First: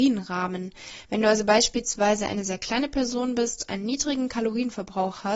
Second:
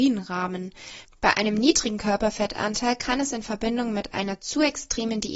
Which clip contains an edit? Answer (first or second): second